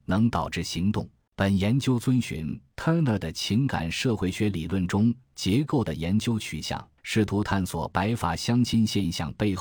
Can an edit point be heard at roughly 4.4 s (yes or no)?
no